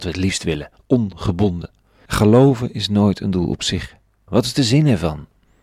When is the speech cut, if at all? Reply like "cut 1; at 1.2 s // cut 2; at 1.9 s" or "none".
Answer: cut 1; at 2.1 s // cut 2; at 4.3 s